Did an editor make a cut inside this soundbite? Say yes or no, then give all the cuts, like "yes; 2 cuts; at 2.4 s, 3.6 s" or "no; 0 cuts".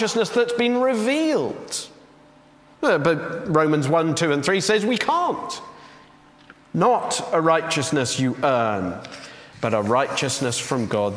yes; 3 cuts; at 2.8 s, 6.5 s, 9.5 s